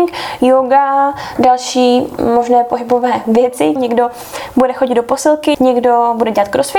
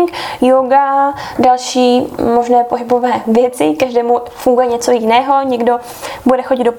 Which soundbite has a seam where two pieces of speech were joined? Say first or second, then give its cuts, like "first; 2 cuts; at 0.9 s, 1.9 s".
first; 2 cuts; at 3.8 s, 5.5 s